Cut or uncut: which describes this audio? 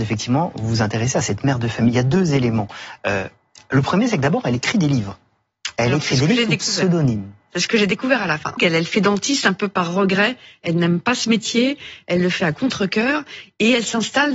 cut